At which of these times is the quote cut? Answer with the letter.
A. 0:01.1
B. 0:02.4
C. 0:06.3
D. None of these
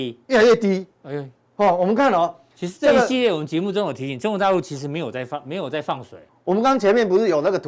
C